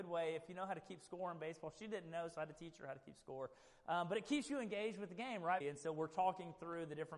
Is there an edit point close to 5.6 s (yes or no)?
yes